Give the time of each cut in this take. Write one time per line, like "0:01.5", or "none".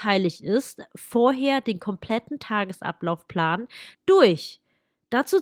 0:03.9